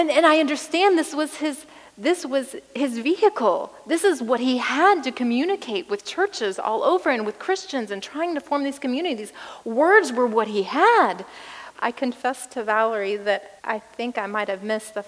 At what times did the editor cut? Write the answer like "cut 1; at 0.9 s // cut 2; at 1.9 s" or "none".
cut 1; at 11.7 s // cut 2; at 13.6 s